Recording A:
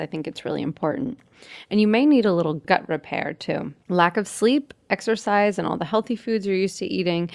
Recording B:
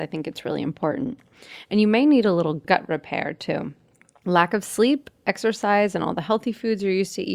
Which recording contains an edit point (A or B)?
A